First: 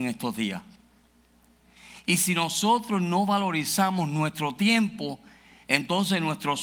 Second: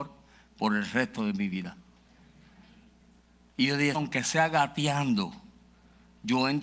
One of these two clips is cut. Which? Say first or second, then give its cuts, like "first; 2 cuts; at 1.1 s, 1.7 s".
second; 1 cut; at 3.9 s